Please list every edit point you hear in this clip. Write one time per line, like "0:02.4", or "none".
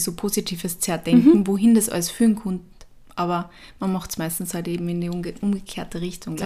none